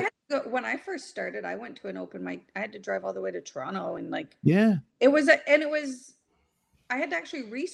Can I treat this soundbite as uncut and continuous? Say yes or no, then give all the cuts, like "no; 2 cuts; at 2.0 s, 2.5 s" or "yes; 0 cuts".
yes; 0 cuts